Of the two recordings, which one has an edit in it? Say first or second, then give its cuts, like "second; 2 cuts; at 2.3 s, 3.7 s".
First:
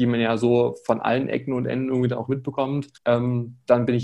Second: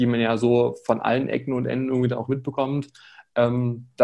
first; 1 cut; at 3.0 s